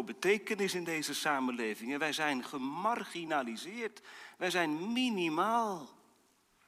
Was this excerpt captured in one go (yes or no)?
yes